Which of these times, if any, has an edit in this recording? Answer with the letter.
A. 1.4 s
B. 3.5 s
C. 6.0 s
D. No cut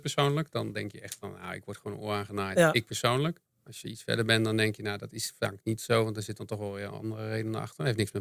B